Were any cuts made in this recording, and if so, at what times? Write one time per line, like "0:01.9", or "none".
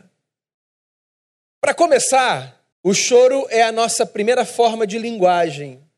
0:01.4
0:02.7